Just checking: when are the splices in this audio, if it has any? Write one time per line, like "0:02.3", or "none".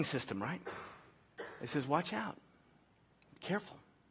none